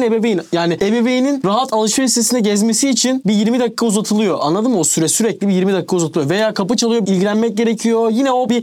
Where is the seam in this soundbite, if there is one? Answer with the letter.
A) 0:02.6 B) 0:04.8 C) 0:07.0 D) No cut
C